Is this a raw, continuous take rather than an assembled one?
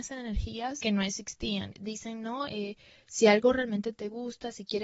no; 1 cut; at 1.7 s

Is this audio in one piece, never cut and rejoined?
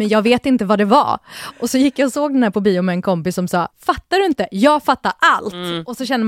no; 1 cut; at 3.7 s

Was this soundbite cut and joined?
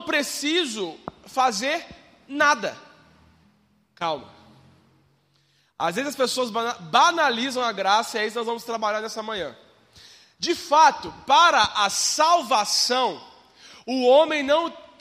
no; 0 cuts

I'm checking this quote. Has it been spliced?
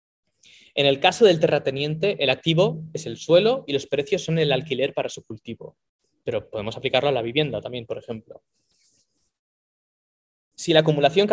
no; 0 cuts

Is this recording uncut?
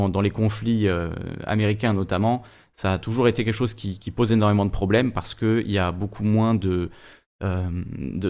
yes; 0 cuts

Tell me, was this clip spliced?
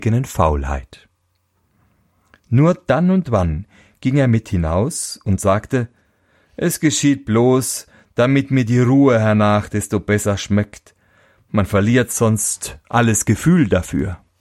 no; 0 cuts

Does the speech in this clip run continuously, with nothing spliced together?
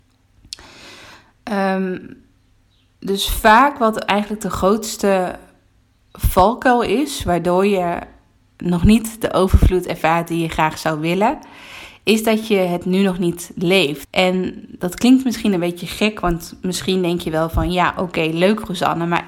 no; 1 cut; at 14.0 s

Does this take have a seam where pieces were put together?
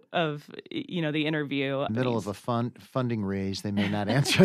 yes; 1 cut; at 1.9 s

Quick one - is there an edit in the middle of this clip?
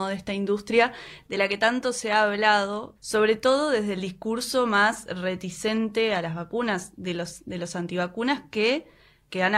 no; 0 cuts

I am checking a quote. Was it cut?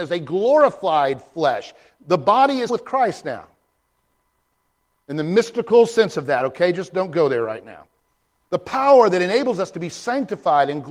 yes; 2 cuts; at 2.7 s, 8.4 s

